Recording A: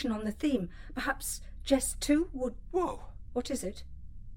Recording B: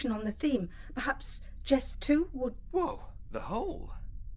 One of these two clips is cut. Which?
B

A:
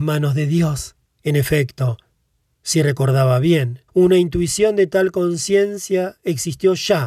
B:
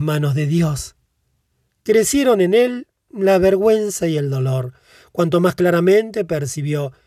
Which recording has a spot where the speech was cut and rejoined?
A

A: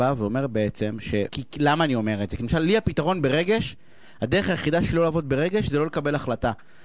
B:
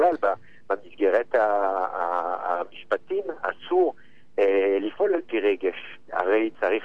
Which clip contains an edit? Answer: A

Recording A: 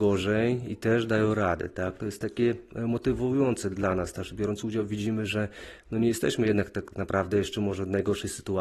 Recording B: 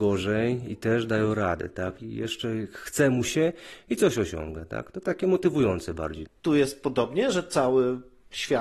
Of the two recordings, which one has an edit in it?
B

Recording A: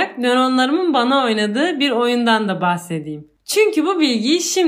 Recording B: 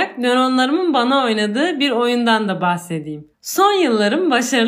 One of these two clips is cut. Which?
B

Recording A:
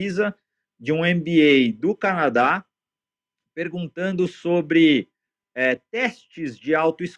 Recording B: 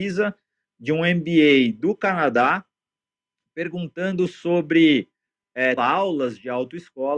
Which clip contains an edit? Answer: B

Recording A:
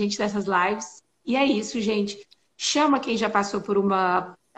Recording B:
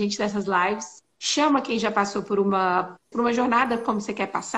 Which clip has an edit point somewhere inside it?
B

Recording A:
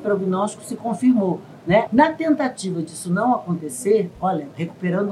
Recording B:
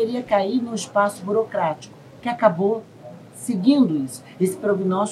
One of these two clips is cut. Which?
A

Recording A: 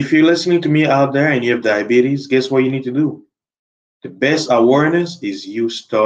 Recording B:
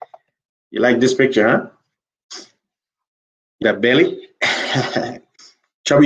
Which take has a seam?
B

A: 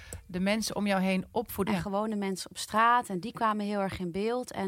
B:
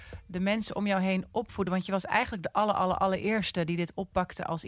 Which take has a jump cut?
A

